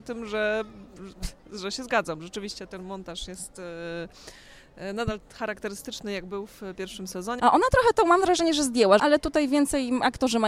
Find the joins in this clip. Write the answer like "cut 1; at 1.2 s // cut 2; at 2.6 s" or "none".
cut 1; at 7.4 s // cut 2; at 9.0 s